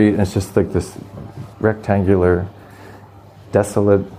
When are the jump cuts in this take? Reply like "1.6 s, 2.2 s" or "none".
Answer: 1.5 s